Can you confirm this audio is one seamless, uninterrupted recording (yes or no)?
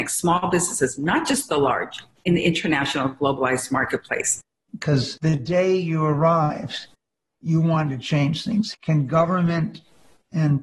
no